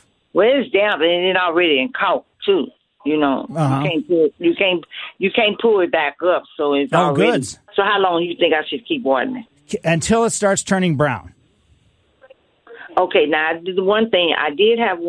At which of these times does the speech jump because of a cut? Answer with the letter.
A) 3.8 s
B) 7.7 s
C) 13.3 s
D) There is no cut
B